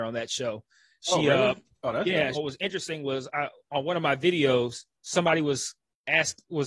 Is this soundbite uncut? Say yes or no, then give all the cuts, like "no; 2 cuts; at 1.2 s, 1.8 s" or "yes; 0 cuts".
no; 2 cuts; at 2.3 s, 4.9 s